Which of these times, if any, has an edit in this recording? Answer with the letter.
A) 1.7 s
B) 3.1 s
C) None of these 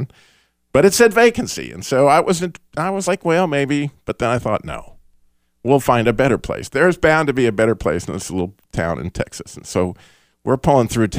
C